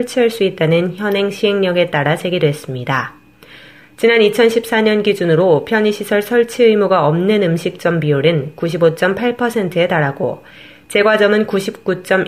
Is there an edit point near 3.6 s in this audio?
no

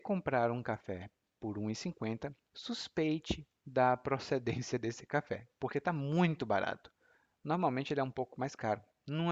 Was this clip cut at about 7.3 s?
no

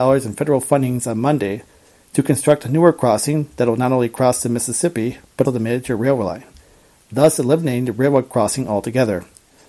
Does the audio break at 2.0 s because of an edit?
no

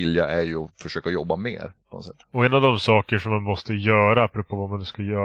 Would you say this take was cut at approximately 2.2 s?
yes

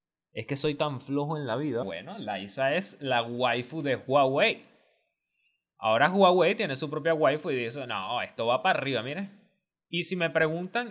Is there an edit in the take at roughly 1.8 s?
yes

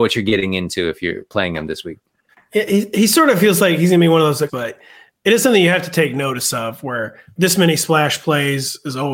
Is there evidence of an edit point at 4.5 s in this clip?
yes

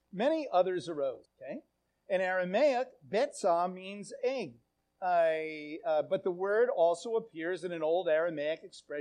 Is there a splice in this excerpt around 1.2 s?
yes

